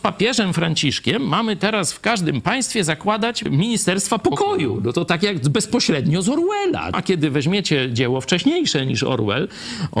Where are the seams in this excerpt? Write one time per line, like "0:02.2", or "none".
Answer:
none